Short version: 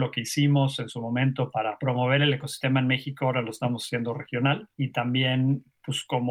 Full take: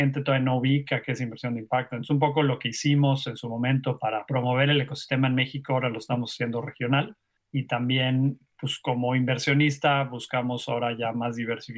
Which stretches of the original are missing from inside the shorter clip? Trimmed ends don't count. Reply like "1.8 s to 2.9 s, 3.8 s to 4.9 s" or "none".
7.2 s to 7.5 s